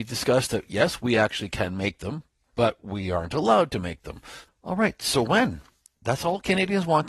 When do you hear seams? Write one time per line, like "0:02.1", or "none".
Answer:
0:04.5